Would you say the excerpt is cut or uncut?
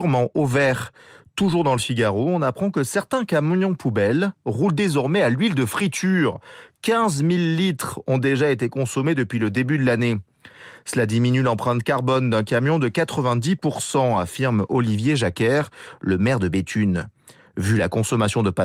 uncut